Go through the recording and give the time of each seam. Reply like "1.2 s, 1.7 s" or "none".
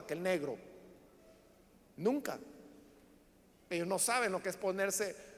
none